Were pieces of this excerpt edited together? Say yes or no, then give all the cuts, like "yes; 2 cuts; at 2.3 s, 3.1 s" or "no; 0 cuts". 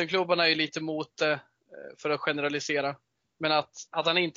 no; 0 cuts